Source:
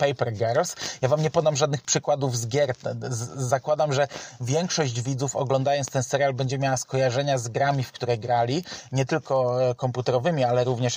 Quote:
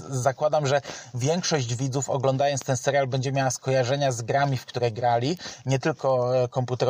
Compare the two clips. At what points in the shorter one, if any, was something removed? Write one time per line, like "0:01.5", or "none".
none